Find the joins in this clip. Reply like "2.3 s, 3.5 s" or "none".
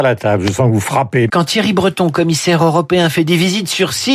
1.3 s